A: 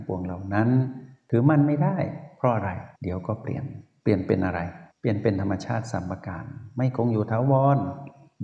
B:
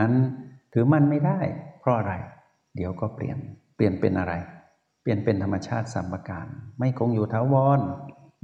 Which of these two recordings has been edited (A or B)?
A